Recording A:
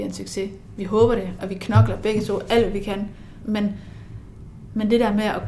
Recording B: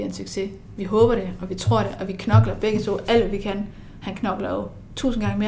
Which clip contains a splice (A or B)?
A